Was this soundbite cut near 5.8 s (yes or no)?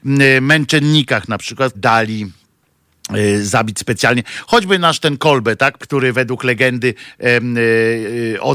yes